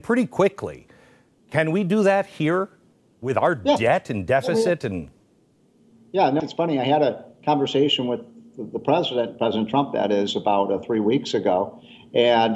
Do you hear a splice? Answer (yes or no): yes